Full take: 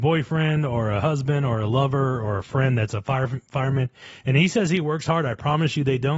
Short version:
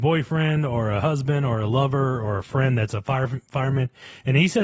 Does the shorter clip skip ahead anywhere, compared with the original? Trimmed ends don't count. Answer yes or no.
no